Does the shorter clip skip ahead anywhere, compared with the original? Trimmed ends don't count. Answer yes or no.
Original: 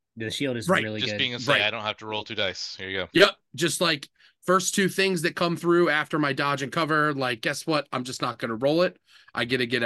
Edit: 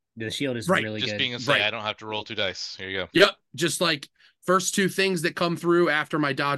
no